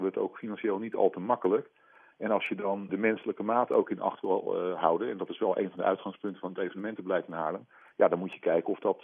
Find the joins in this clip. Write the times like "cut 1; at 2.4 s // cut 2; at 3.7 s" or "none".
cut 1; at 2.9 s

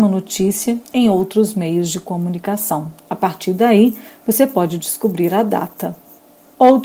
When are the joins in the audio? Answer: none

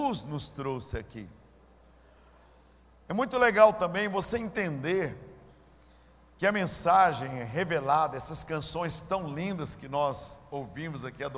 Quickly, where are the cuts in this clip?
none

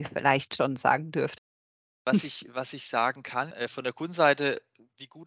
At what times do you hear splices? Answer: cut 1; at 3.5 s

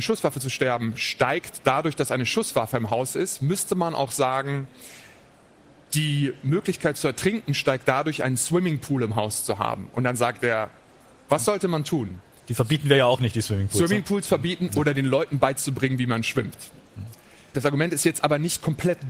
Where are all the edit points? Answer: cut 1; at 17.5 s

